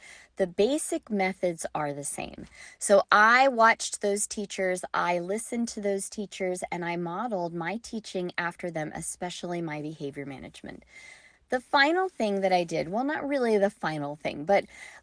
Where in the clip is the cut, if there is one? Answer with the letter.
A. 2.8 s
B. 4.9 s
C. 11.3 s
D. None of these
D